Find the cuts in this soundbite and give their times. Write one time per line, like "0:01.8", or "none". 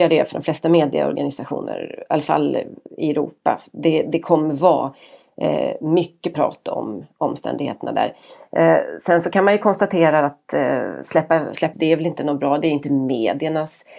0:11.7